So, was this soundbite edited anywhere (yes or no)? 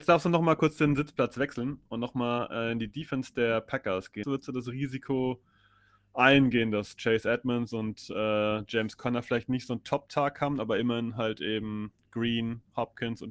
yes